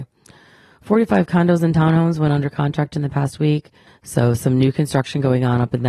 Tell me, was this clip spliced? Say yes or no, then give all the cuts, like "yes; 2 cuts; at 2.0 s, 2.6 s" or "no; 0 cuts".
yes; 1 cut; at 3.9 s